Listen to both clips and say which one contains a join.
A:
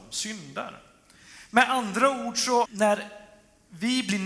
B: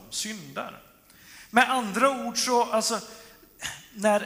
A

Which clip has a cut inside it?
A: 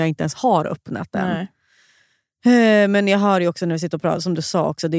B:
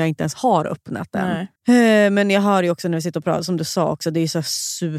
B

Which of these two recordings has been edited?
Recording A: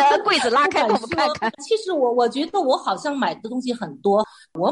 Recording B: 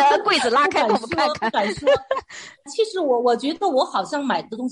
A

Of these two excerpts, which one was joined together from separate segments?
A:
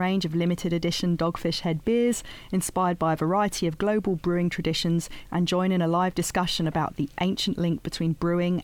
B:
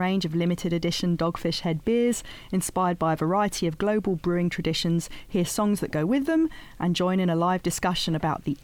A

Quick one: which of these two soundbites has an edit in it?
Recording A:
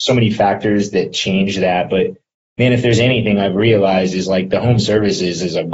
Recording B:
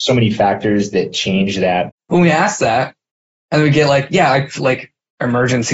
B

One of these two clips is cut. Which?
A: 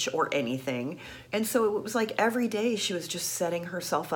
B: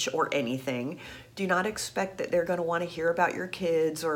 A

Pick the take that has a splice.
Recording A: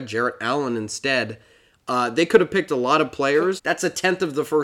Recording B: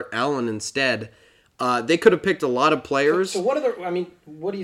A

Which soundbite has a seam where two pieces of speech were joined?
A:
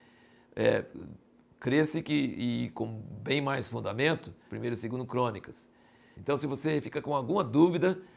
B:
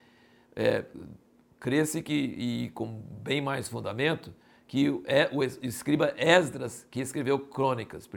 A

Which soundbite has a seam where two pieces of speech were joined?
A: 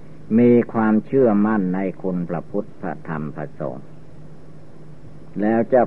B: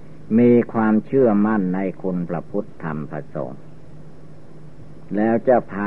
B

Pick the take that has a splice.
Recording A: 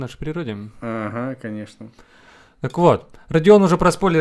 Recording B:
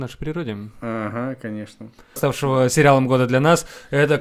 B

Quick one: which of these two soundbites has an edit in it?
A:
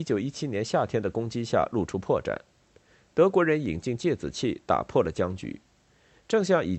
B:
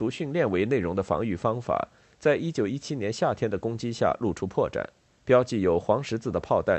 B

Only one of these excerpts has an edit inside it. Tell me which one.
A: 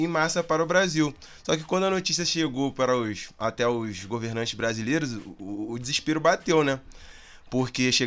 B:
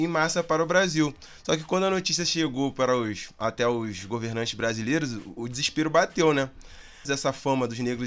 B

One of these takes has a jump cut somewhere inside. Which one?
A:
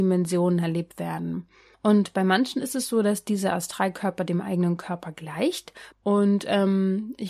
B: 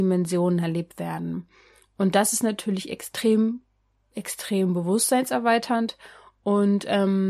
A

